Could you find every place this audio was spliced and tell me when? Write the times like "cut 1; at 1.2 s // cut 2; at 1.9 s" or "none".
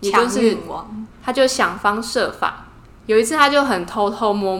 cut 1; at 1.1 s // cut 2; at 3.0 s